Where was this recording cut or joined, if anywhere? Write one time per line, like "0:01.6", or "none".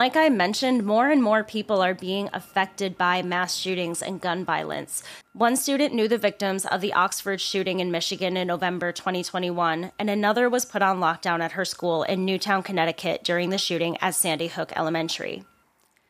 0:05.2